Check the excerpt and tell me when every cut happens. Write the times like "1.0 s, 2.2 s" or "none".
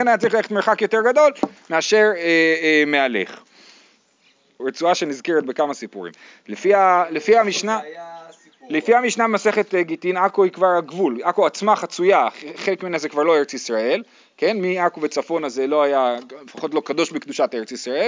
4.6 s